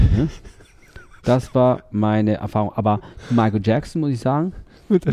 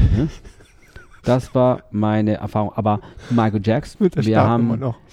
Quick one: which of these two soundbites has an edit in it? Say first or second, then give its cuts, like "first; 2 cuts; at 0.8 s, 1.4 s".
second; 1 cut; at 3.9 s